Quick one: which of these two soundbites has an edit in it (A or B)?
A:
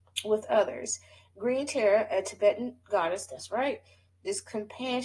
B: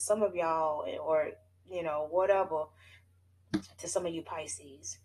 A